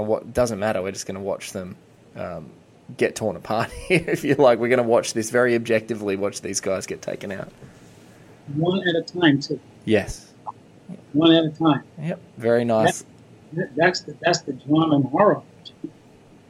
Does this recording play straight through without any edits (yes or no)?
yes